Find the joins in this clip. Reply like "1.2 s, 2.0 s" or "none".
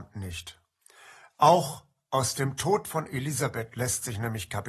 none